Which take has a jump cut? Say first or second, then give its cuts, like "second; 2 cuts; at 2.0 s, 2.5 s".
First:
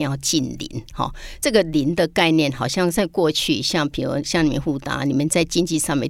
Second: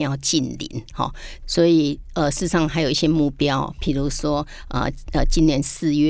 second; 1 cut; at 1.4 s